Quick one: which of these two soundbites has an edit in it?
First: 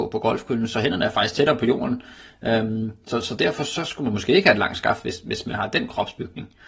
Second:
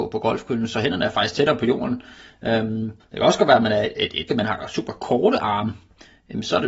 second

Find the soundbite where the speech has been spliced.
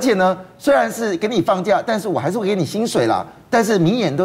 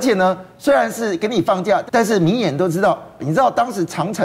second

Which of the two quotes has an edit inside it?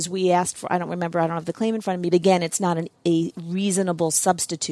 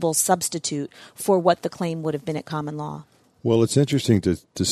first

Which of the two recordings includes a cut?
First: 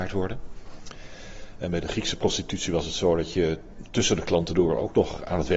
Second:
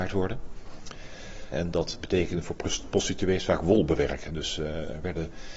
second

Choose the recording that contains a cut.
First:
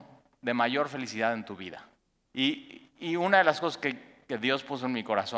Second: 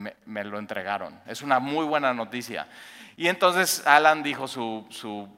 first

